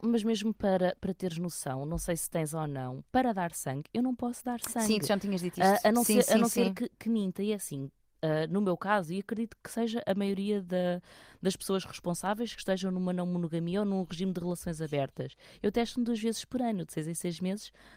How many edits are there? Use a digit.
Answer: 0